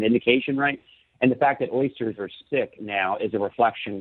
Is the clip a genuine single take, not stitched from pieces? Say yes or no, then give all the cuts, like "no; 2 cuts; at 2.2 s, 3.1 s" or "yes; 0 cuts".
no; 1 cut; at 2.4 s